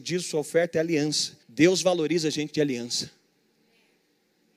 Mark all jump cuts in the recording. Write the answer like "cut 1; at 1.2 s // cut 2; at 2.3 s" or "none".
cut 1; at 1.4 s